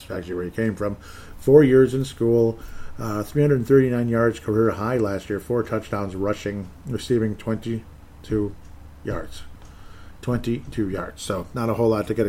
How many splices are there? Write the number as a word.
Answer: zero